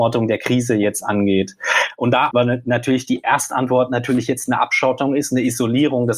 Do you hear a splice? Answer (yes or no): yes